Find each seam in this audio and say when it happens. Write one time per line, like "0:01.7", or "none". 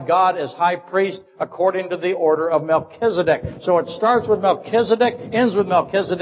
none